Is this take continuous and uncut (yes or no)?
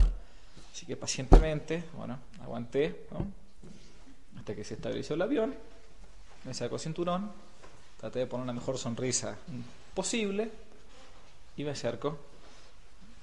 yes